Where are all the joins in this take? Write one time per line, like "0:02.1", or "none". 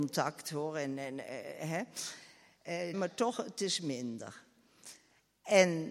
0:02.9